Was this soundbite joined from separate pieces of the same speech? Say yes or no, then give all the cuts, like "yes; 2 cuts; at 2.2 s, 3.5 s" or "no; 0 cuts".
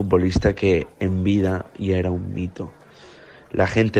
no; 0 cuts